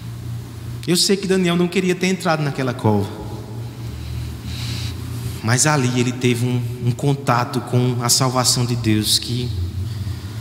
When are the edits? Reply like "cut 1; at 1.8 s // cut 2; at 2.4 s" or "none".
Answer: none